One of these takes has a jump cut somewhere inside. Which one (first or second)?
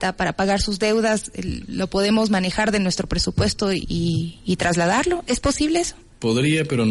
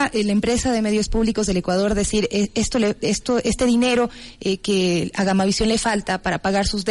first